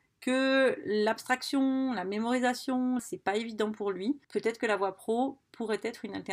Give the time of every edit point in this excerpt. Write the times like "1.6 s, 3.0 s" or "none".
3.0 s, 4.2 s